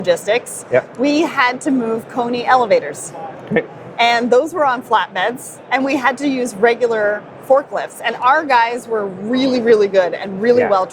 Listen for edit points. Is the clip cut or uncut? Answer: uncut